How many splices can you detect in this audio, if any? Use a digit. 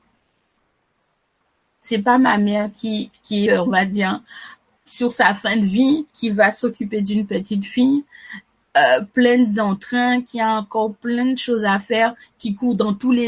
2